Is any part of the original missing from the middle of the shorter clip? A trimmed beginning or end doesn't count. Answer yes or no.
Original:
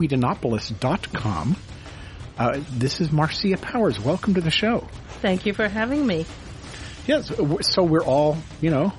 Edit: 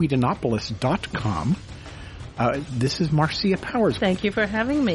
yes